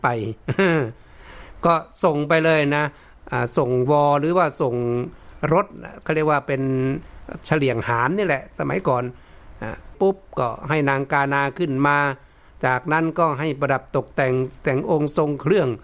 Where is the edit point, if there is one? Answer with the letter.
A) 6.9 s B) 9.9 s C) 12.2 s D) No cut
B